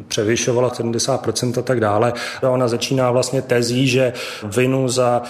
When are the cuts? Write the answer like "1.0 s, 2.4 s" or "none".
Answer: 2.4 s